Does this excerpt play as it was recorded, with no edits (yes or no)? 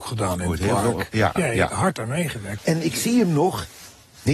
no